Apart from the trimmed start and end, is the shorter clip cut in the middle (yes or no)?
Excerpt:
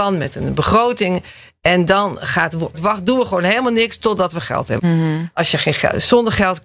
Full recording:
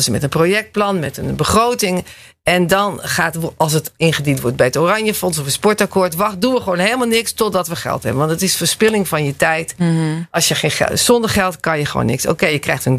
yes